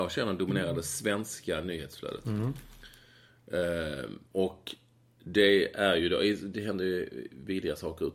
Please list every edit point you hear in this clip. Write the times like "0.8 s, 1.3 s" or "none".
none

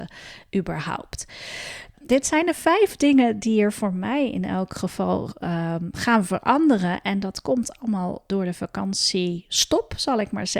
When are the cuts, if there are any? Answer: 1.9 s

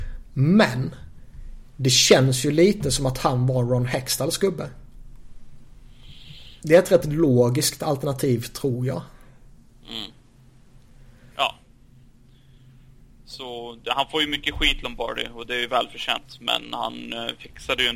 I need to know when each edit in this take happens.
6.6 s, 11.3 s

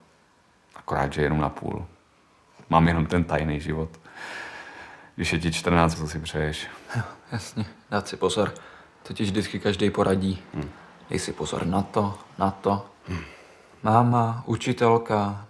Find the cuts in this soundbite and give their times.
5.9 s

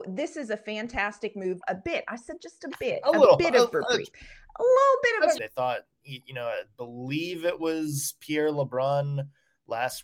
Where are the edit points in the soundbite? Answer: 1.6 s, 5.4 s

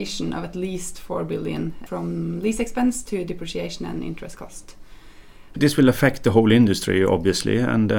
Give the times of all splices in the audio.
5.5 s

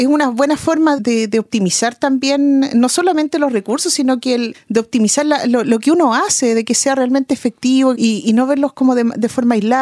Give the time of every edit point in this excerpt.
1.0 s, 4.5 s, 7.9 s

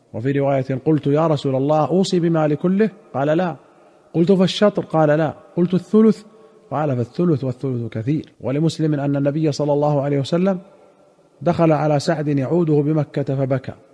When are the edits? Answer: 8.3 s

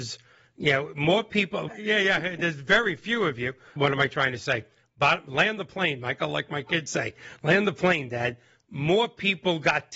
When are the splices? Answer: 1.7 s, 3.8 s

